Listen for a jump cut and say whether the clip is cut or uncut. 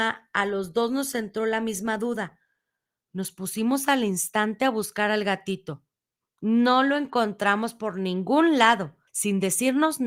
cut